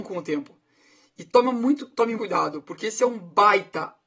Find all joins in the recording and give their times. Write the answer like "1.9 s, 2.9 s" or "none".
2.2 s

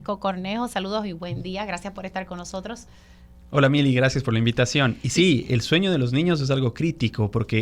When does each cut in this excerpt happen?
none

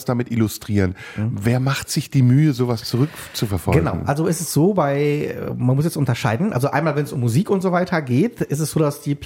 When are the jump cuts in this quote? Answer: none

